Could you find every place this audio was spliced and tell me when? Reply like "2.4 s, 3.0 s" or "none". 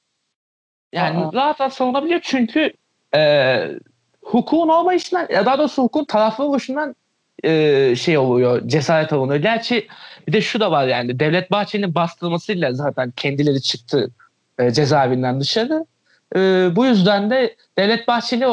none